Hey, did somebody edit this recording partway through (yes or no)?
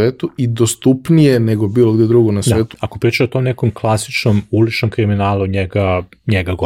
yes